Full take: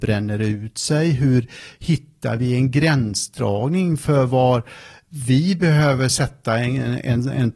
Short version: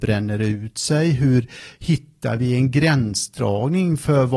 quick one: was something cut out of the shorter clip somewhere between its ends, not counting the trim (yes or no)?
no